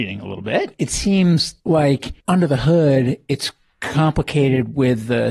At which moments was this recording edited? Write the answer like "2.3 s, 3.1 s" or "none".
2.2 s

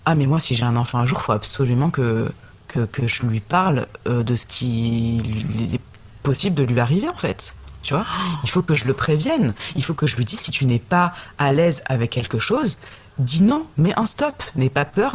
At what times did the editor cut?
none

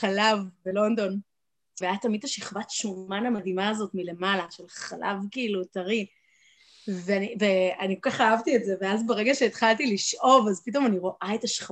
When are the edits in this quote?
1.8 s

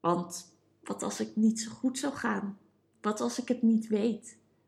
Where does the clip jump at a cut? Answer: 2.9 s

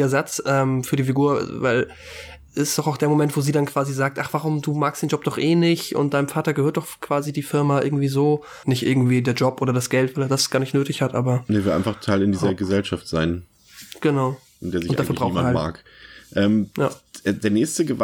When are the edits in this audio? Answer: 8.6 s

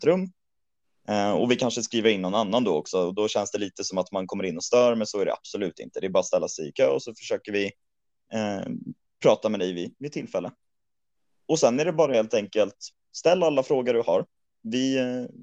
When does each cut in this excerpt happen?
none

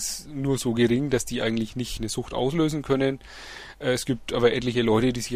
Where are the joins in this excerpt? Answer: 2.0 s

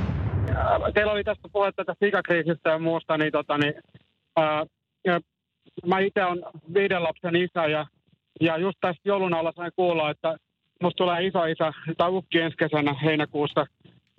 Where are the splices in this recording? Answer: none

